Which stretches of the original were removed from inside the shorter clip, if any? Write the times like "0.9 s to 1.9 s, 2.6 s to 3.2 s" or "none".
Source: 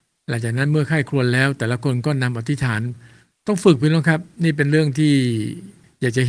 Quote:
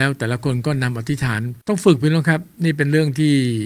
3.0 s to 3.4 s